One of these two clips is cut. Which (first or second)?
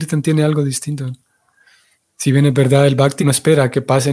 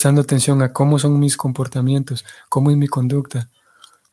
first